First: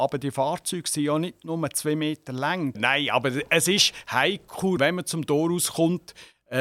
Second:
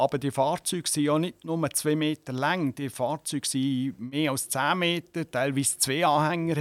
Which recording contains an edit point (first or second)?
first